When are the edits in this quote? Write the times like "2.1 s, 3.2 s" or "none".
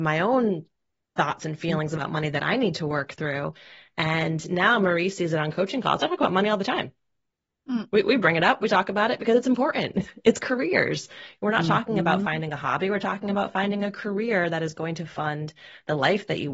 none